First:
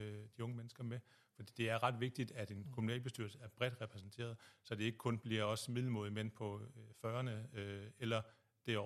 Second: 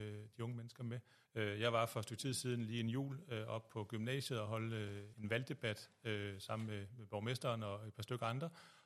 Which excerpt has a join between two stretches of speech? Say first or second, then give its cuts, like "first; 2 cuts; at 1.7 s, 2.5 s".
second; 2 cuts; at 1.3 s, 5.1 s